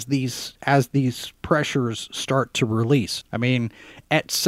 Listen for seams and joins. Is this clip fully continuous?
no; 1 cut; at 3.2 s

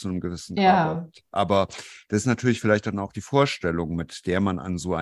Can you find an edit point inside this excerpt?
no; 0 cuts

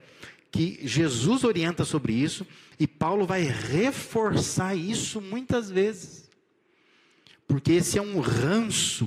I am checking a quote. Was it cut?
no; 0 cuts

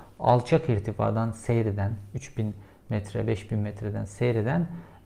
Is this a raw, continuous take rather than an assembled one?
yes; 0 cuts

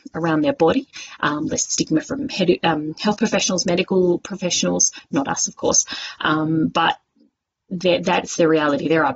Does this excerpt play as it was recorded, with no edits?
yes; 0 cuts

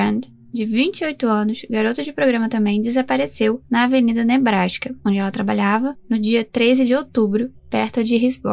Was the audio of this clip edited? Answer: yes; 1 cut; at 7.5 s

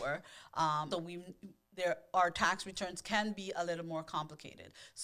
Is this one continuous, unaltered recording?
no; 1 cut; at 0.9 s

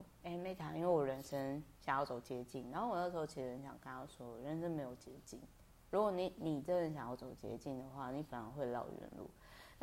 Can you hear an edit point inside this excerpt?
no; 0 cuts

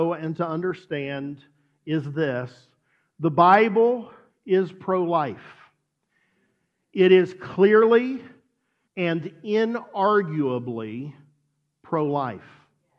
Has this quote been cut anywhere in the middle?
yes; 1 cut; at 8.9 s

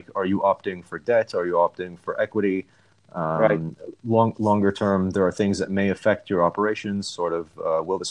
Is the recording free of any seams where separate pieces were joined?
yes; 0 cuts

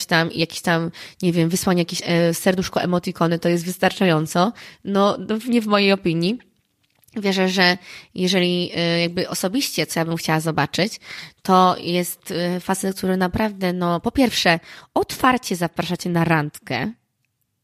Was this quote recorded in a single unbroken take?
yes; 0 cuts

